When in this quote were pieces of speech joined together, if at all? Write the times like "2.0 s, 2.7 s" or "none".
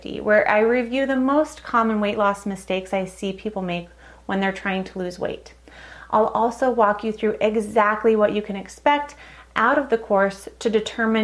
none